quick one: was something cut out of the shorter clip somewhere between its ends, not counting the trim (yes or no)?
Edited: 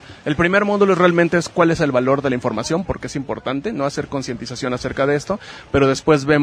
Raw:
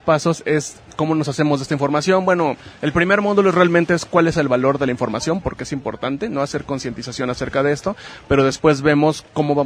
no